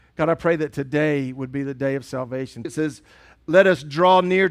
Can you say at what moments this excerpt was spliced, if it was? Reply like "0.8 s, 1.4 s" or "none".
2.6 s